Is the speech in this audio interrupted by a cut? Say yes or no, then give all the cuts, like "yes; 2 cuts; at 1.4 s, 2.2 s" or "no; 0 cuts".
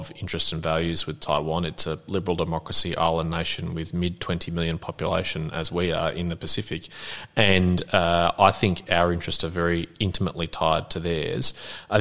no; 0 cuts